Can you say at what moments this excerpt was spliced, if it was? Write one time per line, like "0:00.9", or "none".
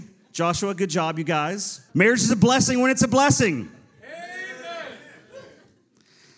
0:01.9